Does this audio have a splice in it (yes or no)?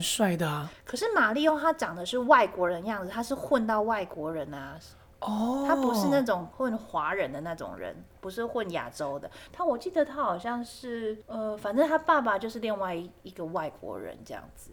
no